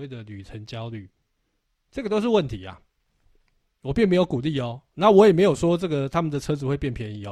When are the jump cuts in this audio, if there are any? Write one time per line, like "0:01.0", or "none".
none